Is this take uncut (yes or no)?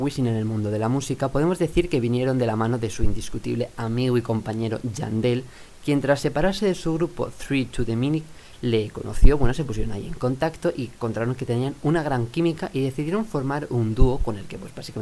yes